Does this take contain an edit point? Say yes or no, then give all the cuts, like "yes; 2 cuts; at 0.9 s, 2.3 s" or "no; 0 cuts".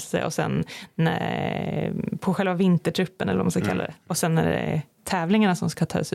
no; 0 cuts